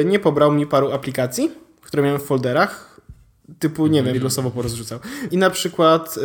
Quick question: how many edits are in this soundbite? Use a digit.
2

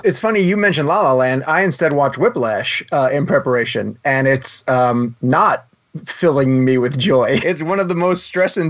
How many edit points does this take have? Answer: 1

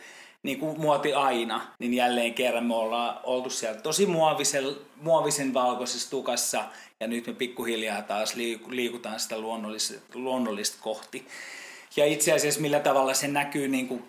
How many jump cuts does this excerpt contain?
1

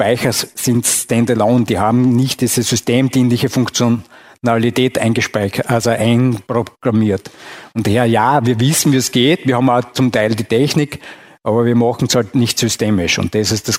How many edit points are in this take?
0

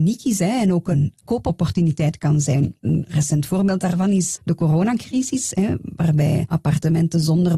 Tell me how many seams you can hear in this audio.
1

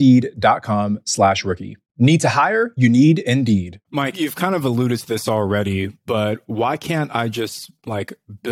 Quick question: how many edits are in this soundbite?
1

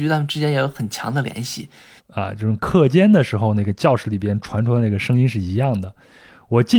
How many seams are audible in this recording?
1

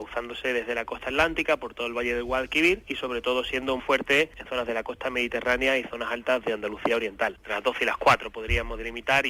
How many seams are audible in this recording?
2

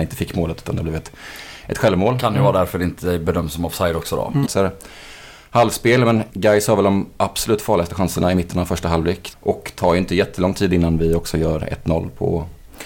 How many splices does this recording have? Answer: 3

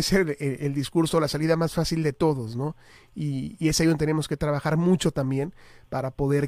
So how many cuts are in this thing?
0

